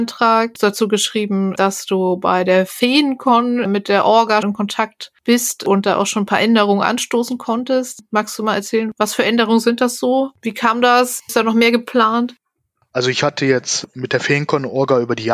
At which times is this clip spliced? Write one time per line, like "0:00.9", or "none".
0:04.4